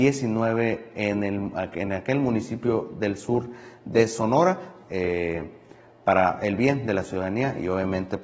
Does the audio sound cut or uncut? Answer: cut